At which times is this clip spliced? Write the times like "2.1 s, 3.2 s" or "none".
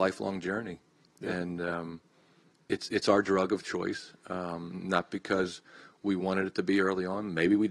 none